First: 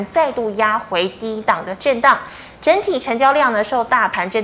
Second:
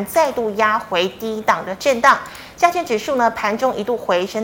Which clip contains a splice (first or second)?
second